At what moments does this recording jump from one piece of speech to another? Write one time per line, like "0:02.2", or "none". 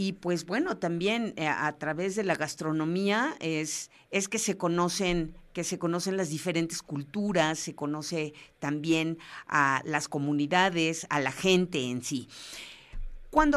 none